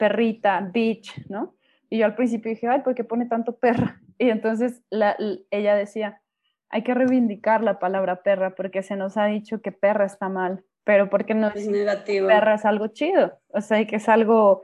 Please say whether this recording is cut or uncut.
uncut